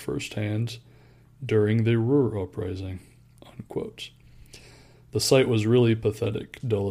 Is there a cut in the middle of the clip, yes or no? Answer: yes